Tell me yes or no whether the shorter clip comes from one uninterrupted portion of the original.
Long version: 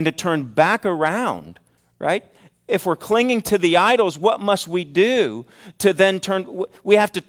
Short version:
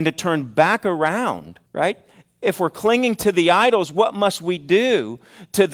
no